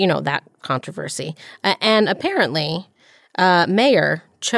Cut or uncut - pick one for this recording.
uncut